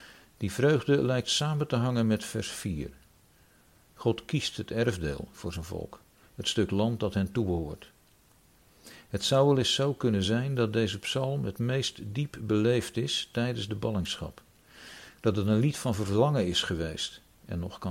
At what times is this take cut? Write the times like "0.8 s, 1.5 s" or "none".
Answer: none